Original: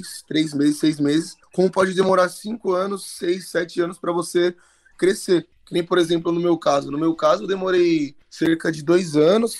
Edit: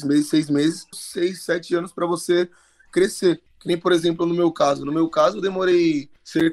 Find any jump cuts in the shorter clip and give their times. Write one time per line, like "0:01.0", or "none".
0:00.9